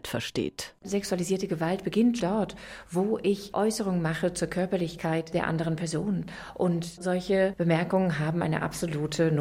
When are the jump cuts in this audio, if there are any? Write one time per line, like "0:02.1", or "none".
0:02.2